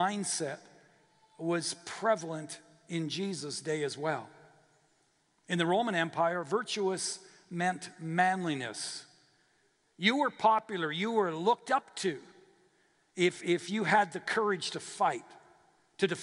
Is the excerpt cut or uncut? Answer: uncut